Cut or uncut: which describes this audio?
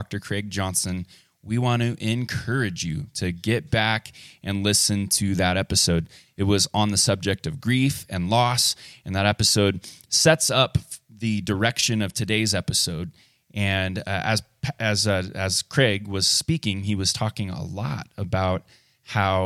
uncut